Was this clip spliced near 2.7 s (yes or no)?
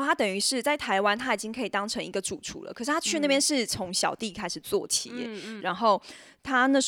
no